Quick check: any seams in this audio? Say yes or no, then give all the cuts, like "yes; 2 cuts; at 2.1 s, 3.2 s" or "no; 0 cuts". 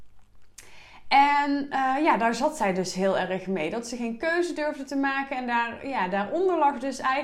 no; 0 cuts